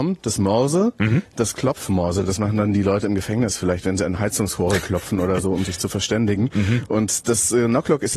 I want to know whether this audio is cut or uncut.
uncut